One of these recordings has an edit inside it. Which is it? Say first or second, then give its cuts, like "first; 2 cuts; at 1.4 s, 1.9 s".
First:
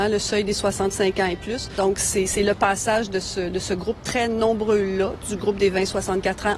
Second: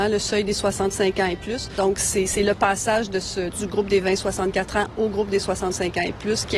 second; 1 cut; at 3.5 s